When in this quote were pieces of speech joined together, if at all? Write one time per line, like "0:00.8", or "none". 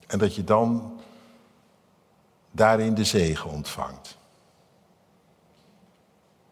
none